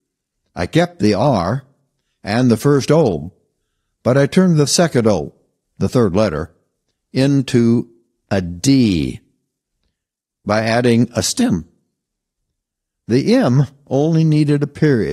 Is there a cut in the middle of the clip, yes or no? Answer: no